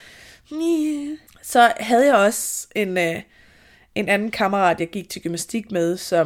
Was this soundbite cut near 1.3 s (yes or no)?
yes